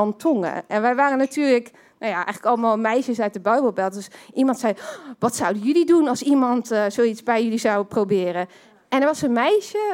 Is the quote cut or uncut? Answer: uncut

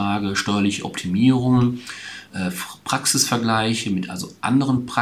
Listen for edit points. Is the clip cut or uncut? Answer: uncut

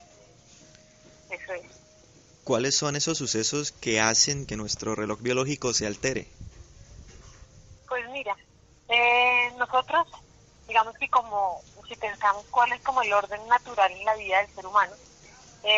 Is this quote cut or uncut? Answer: cut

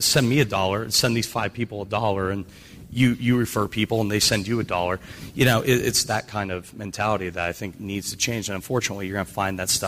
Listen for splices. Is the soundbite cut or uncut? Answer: uncut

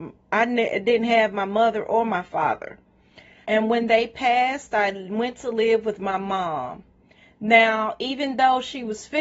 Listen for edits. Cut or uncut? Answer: cut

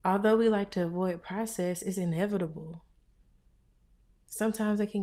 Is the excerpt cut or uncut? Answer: uncut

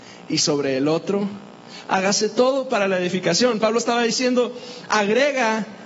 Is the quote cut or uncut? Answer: cut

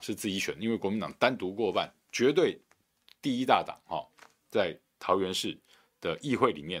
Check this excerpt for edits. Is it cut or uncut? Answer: uncut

